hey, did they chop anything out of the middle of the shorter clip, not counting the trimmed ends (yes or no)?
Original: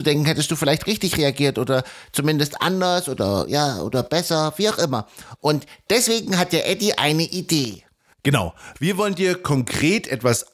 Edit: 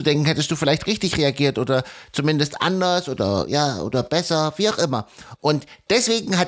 no